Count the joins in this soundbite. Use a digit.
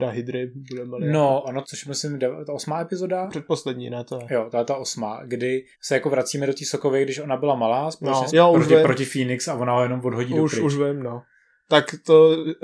3